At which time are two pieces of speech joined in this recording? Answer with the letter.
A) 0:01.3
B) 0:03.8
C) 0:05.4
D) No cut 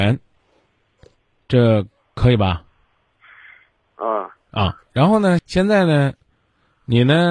C